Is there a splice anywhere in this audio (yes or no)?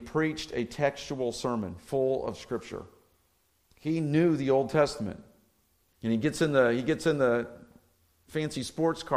yes